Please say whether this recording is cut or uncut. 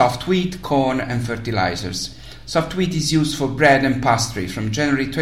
uncut